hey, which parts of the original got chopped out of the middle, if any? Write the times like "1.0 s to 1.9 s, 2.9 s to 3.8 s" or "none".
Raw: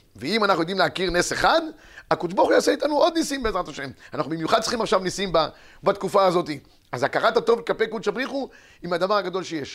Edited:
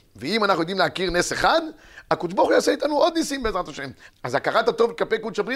4.1 s to 6.8 s